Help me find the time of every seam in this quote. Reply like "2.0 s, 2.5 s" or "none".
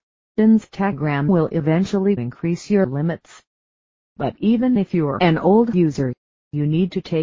none

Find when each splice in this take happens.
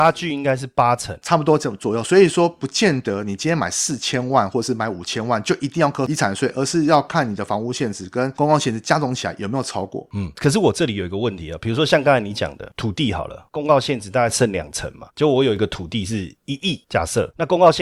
none

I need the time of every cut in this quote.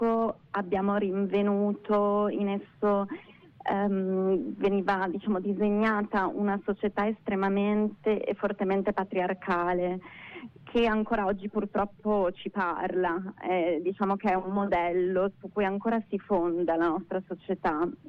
none

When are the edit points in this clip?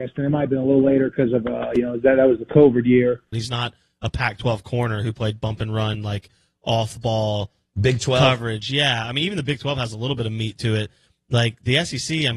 3.3 s

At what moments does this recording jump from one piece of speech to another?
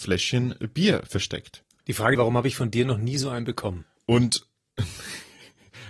2.2 s

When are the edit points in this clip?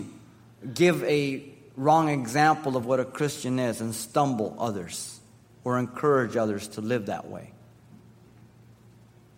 none

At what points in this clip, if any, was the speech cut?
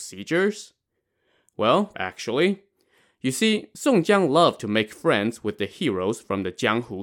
1.9 s

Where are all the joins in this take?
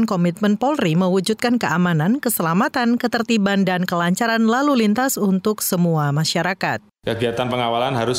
none

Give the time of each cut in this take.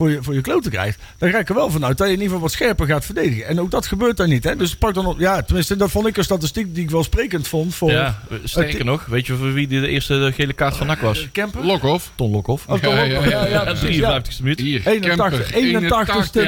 14.6 s

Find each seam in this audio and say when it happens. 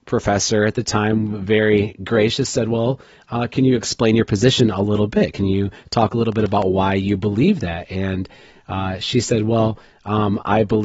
none

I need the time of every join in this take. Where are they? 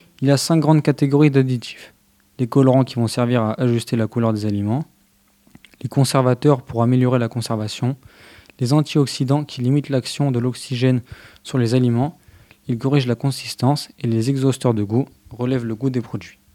12.6 s

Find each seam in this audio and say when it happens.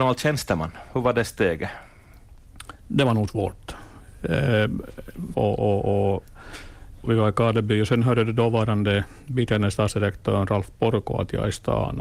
2.8 s, 5.3 s, 7.0 s

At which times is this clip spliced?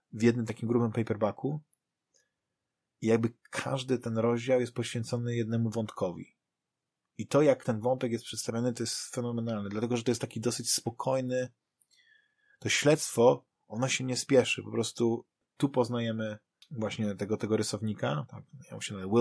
none

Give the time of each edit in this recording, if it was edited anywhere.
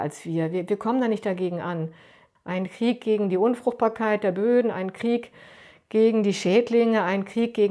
2.4 s

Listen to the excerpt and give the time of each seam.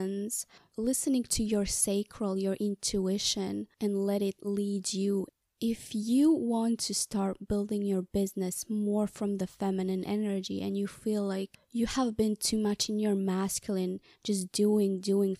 none

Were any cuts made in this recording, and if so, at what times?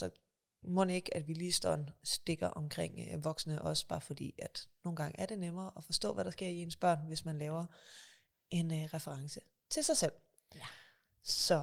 none

